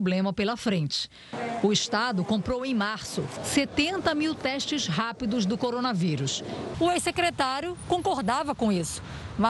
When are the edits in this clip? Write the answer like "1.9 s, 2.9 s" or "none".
3.4 s, 6.7 s